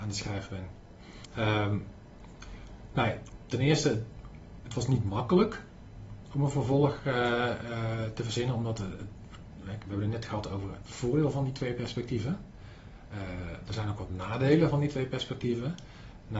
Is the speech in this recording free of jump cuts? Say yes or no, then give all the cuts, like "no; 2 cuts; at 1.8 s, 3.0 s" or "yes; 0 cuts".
yes; 0 cuts